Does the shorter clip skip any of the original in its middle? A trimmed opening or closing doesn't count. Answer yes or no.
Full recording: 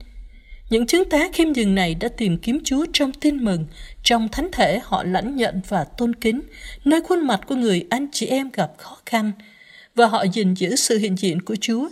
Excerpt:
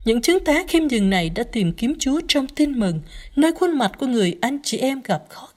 yes